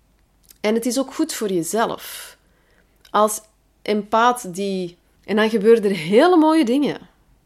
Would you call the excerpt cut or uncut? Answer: cut